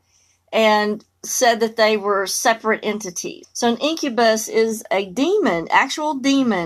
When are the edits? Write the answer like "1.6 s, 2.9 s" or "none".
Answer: 3.4 s